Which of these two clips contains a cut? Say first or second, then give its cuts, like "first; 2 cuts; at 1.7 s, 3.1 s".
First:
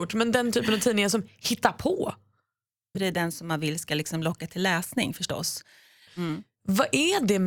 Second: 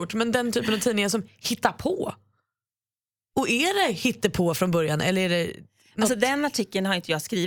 first; 2 cuts; at 2.9 s, 6.1 s